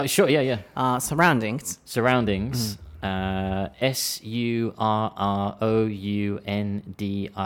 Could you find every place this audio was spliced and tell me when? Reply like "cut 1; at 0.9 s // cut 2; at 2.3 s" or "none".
none